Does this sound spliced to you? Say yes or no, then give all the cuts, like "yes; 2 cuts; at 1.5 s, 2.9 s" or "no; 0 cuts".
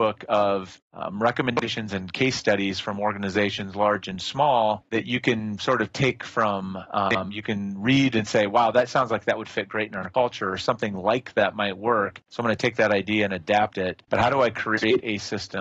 yes; 1 cut; at 14.0 s